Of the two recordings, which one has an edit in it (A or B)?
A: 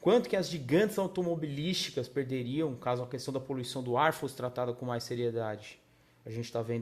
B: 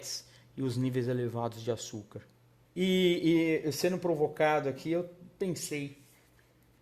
B